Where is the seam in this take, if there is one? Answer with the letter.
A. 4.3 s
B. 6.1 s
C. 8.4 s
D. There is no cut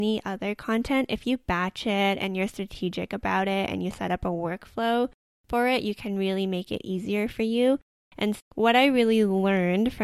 C